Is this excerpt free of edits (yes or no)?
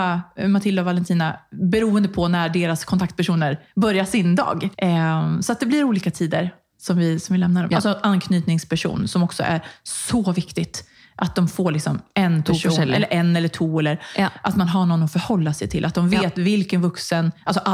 no